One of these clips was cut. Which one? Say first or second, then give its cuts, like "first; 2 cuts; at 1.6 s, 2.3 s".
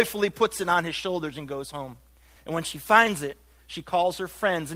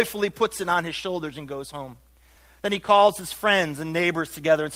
first; 1 cut; at 2.4 s